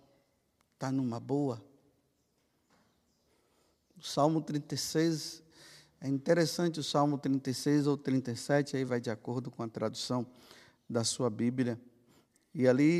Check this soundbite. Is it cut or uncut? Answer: uncut